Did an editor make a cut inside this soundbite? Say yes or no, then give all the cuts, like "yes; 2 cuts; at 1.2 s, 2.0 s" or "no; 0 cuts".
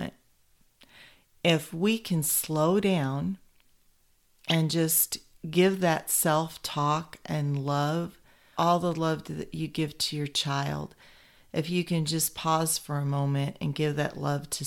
yes; 1 cut; at 8.5 s